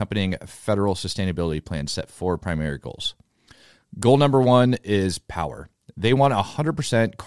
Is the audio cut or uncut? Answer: uncut